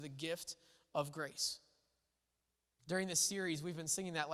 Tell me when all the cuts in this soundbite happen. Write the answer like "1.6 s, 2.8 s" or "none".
2.8 s